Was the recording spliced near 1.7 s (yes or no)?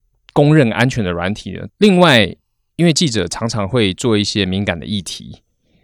yes